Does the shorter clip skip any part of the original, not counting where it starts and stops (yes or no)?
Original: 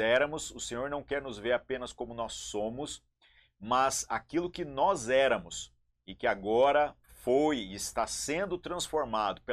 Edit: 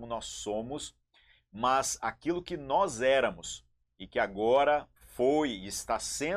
no